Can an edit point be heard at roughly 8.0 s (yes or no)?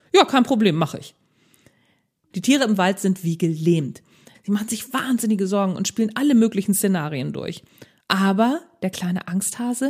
yes